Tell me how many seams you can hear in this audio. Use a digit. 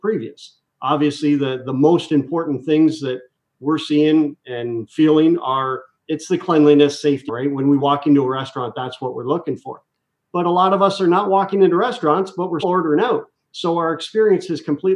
2